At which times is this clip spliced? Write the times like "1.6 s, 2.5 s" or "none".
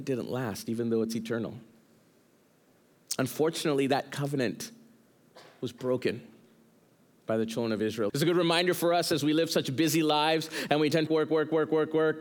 8.1 s, 11.1 s